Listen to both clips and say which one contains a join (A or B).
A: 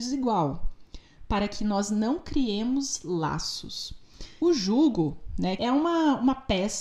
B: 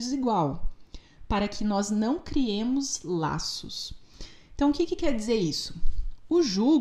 A